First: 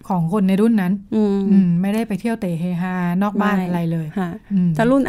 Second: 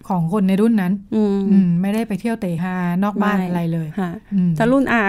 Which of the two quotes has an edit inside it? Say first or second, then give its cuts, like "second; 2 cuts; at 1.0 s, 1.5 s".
second; 1 cut; at 2.6 s